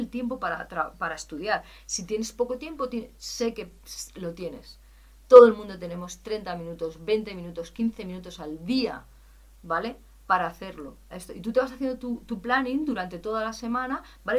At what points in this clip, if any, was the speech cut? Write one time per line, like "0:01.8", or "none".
0:11.1